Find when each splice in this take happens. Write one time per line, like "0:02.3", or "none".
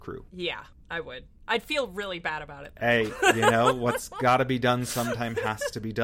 none